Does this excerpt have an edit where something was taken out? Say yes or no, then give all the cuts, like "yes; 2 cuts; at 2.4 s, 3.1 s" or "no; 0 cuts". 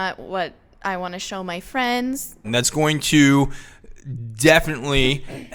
yes; 1 cut; at 2.4 s